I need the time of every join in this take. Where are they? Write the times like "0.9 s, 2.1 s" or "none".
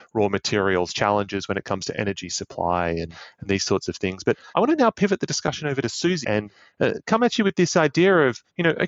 6.2 s